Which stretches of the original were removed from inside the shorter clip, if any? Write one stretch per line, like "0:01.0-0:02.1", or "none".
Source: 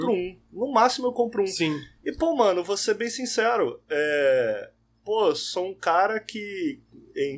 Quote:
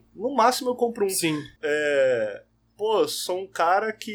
0:01.9-0:03.8